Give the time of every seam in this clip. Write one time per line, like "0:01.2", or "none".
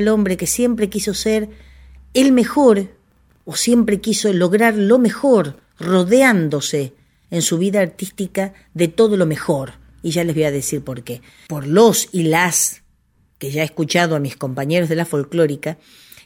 0:11.5